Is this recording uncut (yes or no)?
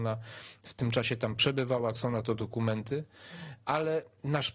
no